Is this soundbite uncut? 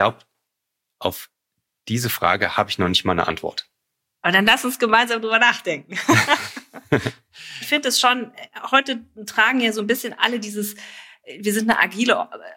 yes; 0 cuts

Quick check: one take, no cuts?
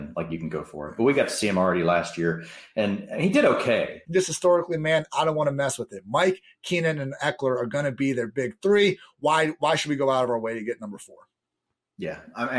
no; 1 cut; at 4.0 s

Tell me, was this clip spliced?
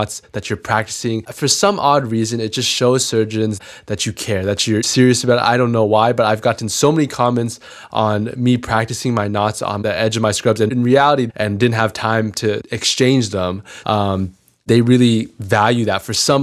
yes; 2 cuts; at 11.3 s, 13.8 s

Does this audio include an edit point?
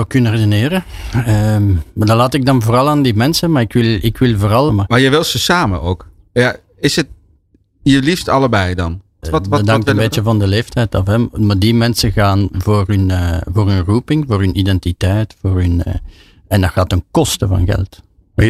yes; 2 cuts; at 4.7 s, 9.2 s

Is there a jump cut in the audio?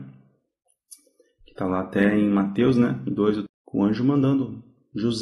yes; 1 cut; at 3.5 s

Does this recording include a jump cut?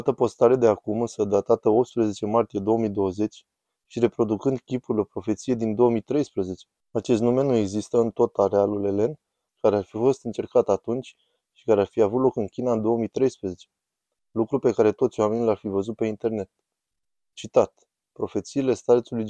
yes; 2 cuts; at 6.8 s, 9.5 s

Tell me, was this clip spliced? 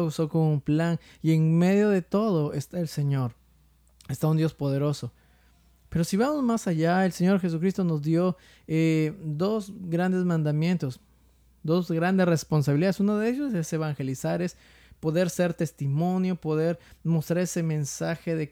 no; 0 cuts

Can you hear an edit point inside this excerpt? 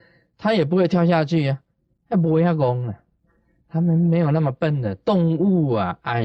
no; 0 cuts

